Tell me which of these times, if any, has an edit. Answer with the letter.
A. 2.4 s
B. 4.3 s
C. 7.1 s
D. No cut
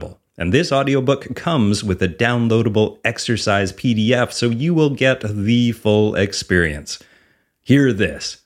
D